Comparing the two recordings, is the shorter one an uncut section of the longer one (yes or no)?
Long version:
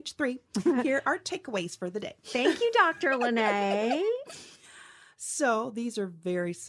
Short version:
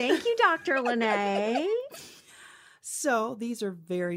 yes